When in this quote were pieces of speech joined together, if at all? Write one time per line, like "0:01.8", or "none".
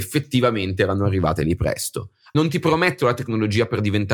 0:02.3